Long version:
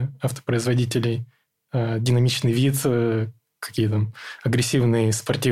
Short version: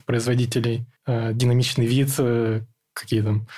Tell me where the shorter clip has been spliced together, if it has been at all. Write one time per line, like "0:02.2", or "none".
0:01.0